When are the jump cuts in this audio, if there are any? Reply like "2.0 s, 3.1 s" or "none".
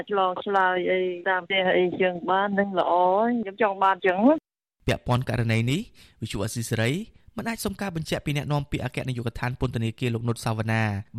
none